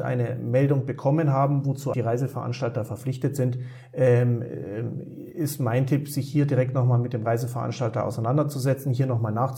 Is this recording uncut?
no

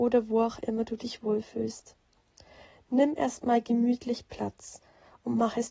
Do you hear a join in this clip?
no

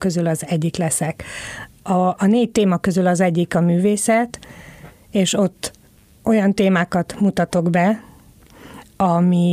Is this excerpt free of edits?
yes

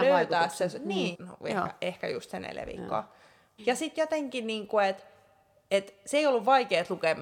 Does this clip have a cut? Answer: yes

